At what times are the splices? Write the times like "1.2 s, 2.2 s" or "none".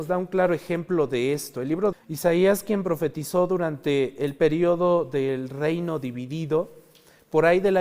1.9 s